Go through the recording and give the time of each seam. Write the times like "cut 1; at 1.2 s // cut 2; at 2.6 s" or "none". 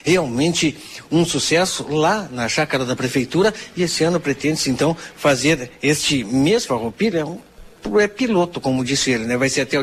none